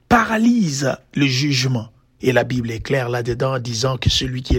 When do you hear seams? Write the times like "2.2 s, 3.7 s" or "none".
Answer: 2.2 s